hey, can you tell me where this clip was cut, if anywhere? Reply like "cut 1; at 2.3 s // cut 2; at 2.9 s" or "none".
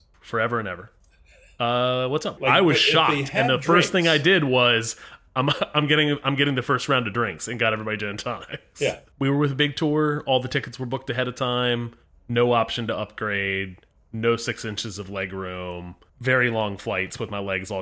cut 1; at 2.4 s